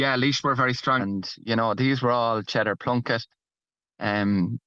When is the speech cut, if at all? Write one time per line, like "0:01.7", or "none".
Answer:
0:01.0